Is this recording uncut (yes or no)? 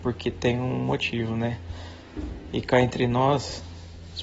yes